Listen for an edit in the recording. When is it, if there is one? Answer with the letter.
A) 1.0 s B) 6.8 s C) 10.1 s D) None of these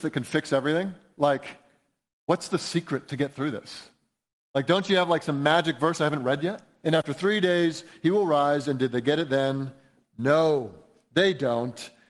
B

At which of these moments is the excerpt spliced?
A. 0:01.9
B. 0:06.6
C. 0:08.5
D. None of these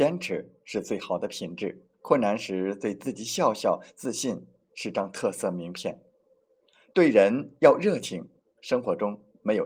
A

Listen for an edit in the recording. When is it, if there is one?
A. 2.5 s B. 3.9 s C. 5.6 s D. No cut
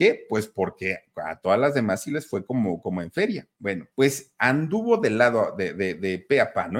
B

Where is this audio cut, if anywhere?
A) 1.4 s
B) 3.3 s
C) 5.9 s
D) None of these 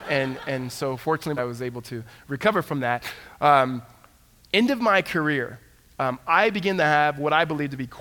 A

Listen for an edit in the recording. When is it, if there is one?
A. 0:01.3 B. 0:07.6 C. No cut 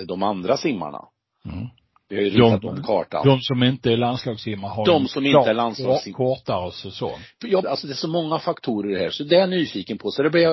B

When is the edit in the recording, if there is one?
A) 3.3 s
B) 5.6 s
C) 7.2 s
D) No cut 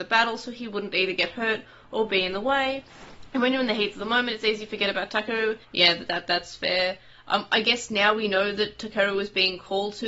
B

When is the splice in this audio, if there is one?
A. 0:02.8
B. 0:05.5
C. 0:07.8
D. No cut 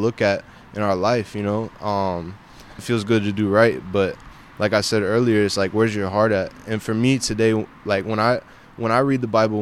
A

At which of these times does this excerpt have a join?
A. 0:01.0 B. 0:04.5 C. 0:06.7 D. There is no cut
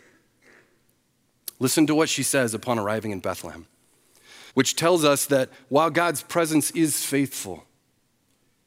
B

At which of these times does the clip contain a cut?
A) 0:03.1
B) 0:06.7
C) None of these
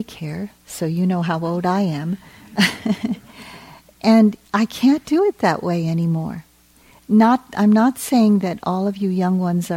C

